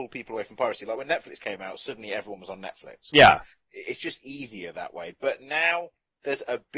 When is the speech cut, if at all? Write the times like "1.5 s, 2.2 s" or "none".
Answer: none